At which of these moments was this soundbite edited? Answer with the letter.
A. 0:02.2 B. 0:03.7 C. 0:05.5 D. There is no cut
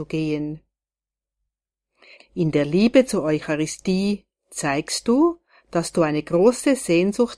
A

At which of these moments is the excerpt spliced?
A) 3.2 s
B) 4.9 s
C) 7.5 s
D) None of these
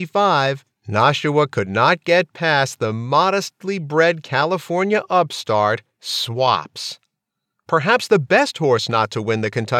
D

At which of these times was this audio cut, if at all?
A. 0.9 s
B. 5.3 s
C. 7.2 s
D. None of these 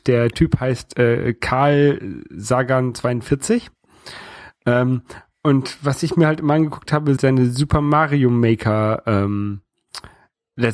C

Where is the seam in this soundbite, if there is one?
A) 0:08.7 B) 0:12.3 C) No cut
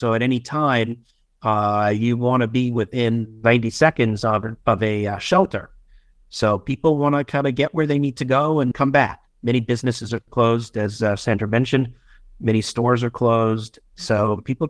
A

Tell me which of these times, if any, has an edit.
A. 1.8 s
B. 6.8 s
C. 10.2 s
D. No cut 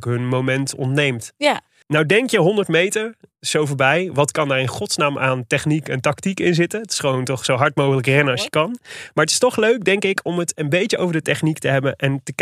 A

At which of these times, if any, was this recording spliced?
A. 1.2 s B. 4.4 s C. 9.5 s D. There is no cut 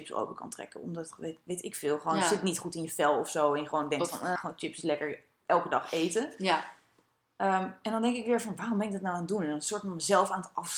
B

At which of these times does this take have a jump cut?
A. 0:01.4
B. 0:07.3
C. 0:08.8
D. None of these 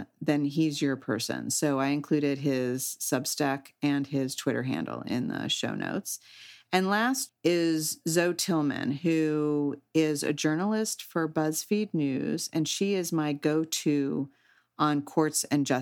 B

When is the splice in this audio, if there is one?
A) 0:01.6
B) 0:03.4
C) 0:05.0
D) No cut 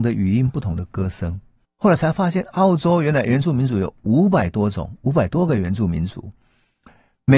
A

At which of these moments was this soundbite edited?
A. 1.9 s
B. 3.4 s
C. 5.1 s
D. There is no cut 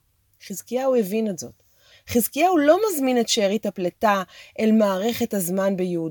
A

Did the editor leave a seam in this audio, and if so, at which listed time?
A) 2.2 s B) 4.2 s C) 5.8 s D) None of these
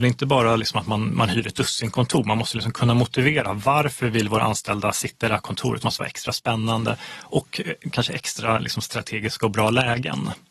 C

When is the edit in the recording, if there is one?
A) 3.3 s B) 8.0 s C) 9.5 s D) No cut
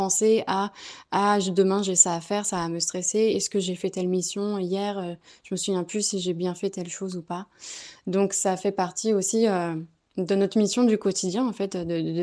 D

